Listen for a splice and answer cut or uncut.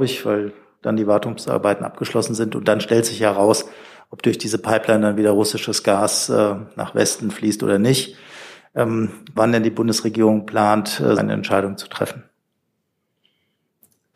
cut